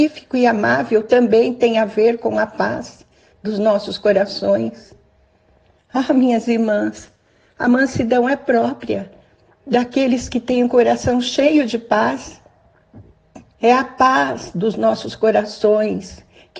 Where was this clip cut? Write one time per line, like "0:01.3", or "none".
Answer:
0:05.8
0:13.5

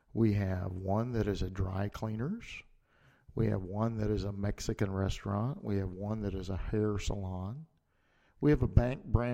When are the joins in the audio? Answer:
none

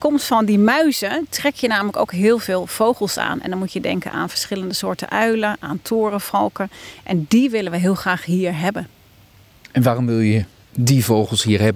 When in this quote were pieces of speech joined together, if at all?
none

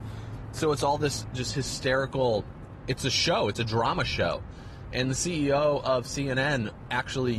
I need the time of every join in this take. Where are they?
none

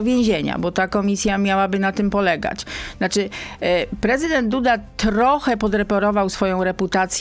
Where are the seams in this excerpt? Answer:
none

